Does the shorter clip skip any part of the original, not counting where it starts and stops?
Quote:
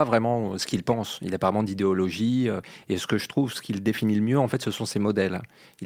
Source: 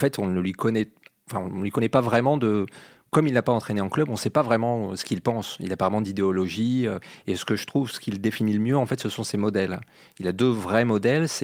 no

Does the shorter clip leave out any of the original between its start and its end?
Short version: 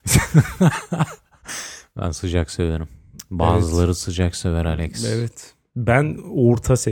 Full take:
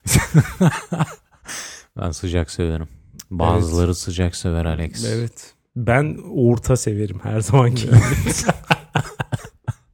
no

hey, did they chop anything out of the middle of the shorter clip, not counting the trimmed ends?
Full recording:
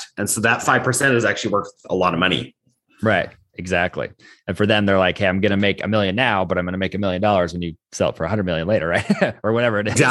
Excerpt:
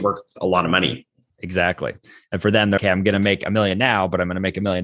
yes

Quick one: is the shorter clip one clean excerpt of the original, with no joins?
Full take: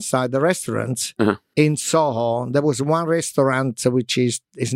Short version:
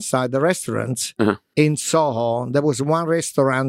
yes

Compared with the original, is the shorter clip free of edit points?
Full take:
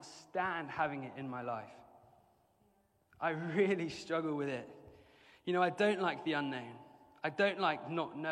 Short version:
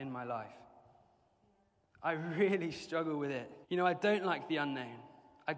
no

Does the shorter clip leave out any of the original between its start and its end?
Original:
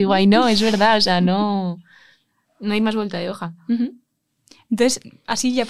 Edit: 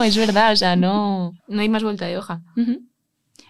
yes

